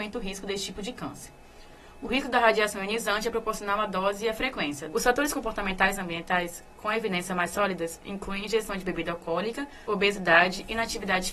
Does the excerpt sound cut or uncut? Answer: cut